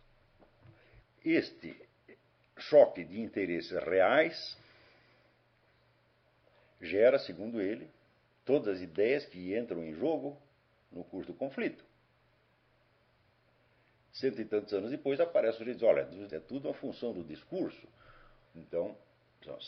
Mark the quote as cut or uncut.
cut